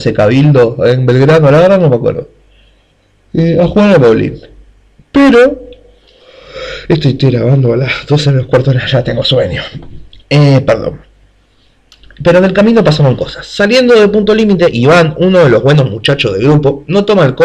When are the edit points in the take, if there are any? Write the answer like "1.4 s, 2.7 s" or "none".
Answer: none